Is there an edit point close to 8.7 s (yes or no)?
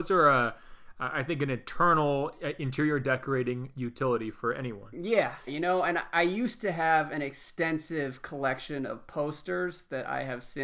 no